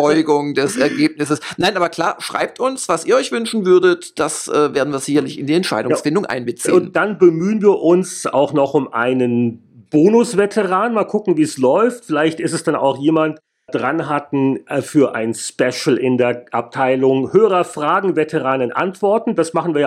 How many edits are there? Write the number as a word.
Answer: one